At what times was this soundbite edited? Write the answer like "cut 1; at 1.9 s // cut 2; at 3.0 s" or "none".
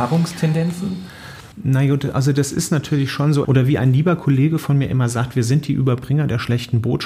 cut 1; at 1.5 s // cut 2; at 3.4 s